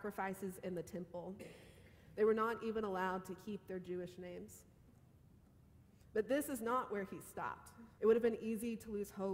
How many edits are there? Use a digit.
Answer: 1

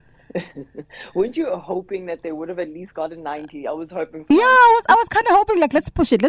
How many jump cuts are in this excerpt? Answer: 0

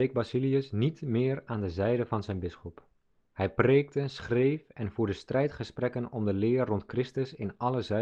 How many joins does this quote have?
0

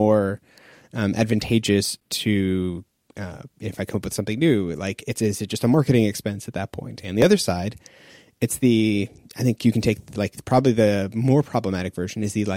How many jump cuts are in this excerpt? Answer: 1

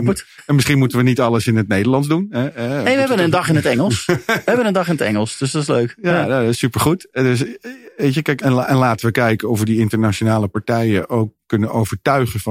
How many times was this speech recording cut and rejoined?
1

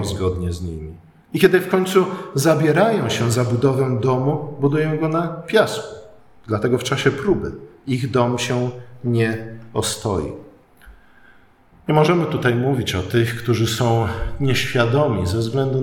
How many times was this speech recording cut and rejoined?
0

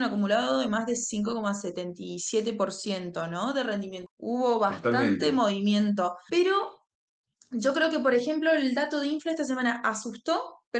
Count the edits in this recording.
2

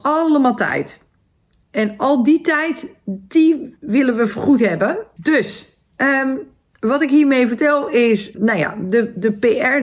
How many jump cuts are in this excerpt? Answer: 2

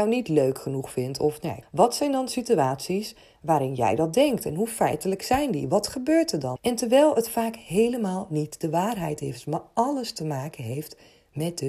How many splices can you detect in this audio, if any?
2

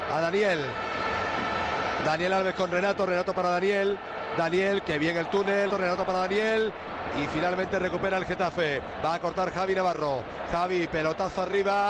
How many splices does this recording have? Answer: 1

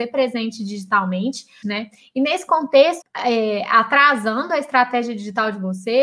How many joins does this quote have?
2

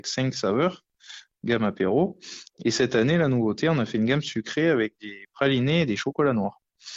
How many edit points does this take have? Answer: 0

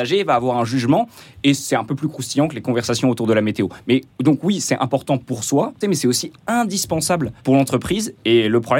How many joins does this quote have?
2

